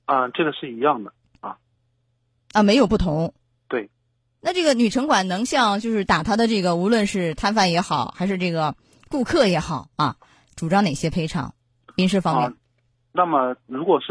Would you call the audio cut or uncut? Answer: uncut